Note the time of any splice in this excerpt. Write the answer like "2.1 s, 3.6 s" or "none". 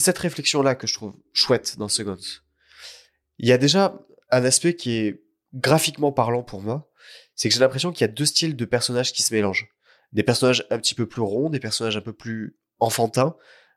none